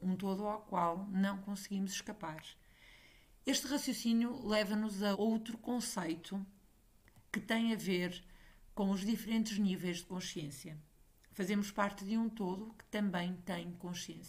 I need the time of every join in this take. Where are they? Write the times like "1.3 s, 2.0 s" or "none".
5.1 s